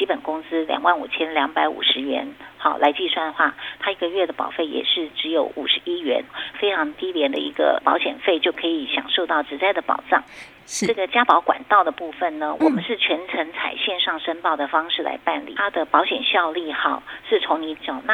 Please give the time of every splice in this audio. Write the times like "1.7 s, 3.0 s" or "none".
15.6 s